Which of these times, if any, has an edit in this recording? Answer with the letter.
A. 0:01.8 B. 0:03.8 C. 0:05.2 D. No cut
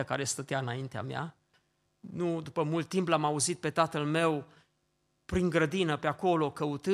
A